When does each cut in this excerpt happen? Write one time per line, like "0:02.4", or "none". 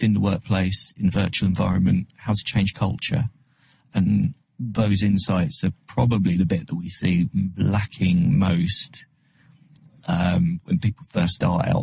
none